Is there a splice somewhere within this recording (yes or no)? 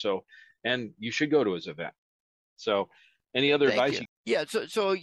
yes